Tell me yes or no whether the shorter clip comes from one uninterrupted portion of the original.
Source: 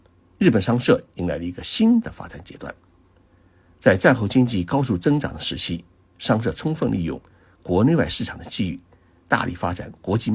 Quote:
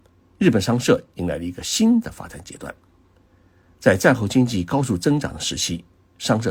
yes